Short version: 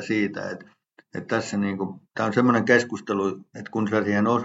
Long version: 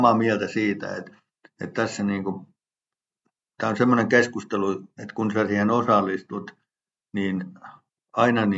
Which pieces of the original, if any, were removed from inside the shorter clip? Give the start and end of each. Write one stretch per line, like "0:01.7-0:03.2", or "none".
0:02.5-0:03.5